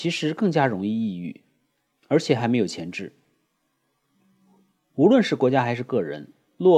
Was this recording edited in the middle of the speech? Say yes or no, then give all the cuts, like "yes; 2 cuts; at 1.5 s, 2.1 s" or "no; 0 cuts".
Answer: no; 0 cuts